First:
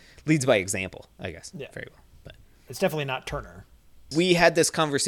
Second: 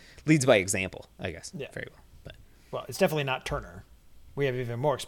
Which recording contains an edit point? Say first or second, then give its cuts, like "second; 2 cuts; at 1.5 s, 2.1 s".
first; 2 cuts; at 2.7 s, 4.1 s